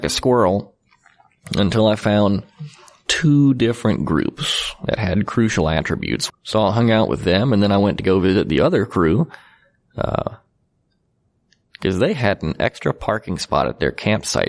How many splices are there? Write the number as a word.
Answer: one